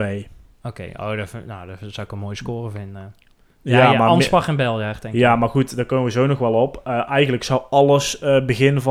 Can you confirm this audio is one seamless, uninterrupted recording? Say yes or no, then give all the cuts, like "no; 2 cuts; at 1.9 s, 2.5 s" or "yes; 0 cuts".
yes; 0 cuts